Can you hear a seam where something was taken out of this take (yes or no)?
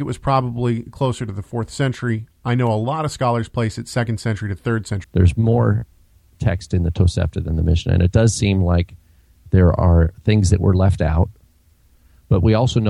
yes